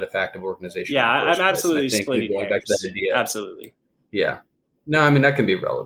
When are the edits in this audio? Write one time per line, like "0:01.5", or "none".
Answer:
none